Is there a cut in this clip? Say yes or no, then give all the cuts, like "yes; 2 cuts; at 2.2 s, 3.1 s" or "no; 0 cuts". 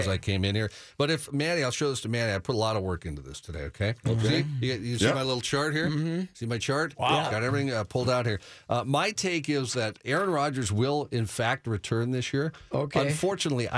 no; 0 cuts